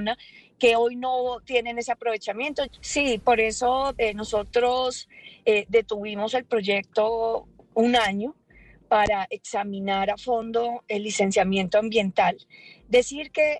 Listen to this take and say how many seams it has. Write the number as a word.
one